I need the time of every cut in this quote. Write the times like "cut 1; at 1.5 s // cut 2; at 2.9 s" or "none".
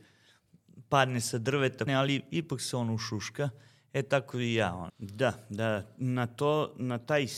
cut 1; at 1.9 s // cut 2; at 4.9 s